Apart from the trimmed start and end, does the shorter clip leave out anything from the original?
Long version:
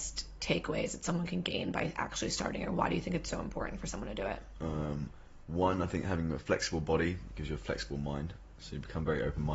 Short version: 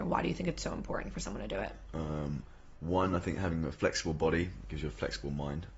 no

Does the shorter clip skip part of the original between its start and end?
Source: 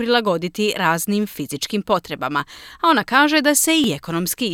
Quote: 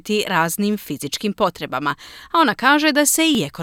no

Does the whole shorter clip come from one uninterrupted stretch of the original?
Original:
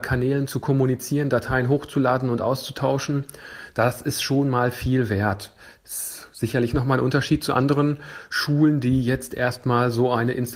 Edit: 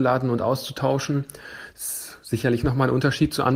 no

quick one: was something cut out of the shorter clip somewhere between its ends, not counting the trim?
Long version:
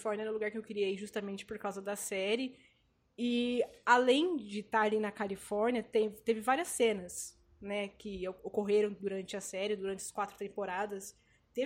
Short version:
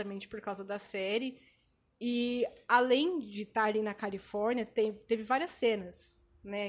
no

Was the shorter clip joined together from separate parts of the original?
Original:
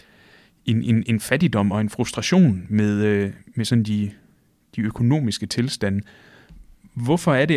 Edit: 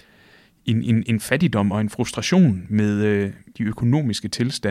yes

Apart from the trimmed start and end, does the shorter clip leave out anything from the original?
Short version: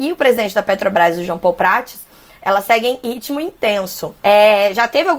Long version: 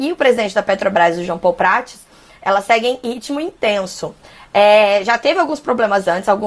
yes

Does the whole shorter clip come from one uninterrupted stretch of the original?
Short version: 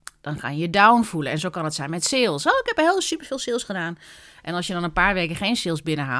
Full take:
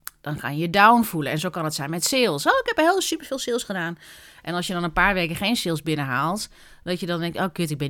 yes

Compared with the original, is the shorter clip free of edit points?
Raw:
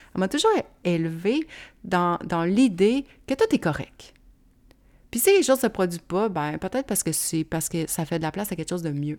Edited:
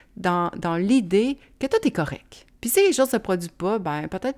no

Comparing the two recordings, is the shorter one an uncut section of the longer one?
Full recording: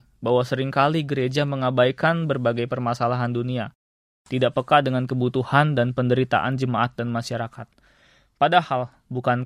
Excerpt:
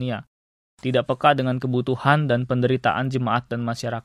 yes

